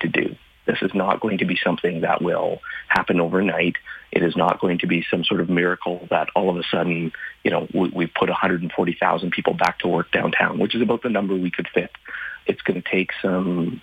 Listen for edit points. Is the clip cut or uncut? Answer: cut